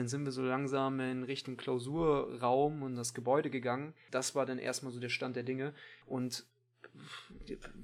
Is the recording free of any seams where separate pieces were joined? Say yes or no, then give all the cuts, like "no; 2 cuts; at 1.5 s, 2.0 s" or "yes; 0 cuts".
no; 2 cuts; at 4.1 s, 6.0 s